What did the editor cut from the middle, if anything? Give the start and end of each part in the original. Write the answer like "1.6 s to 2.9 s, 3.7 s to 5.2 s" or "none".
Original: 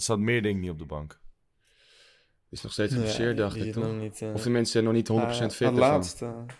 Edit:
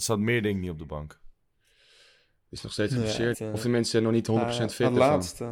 3.3 s to 4.1 s